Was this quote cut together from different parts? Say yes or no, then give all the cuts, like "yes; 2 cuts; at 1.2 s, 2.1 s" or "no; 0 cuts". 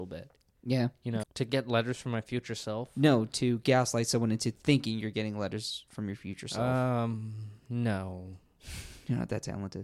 yes; 1 cut; at 1.2 s